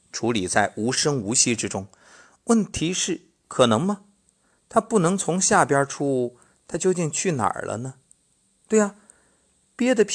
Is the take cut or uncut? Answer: uncut